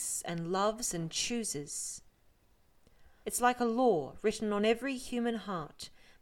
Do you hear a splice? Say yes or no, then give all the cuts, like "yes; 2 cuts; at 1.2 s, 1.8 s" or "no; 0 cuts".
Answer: yes; 1 cut; at 3.2 s